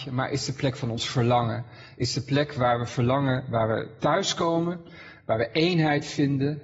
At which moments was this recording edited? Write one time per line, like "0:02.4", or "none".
none